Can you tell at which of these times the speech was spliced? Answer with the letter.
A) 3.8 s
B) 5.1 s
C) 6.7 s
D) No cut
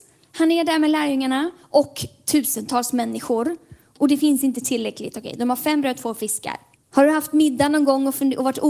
C